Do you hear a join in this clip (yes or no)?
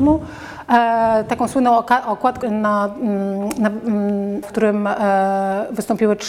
yes